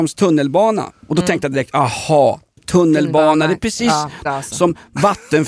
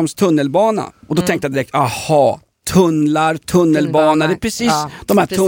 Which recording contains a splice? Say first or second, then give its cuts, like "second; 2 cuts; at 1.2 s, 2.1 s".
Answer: first; 2 cuts; at 2.6 s, 4.2 s